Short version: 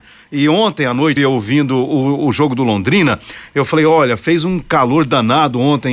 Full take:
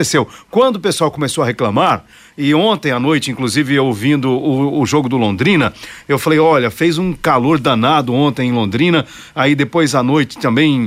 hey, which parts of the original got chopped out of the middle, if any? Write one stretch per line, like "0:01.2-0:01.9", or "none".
0:03.2-0:03.7